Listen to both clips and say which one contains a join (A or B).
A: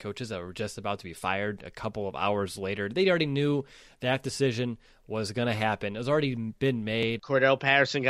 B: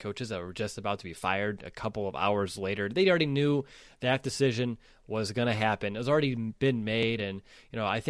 A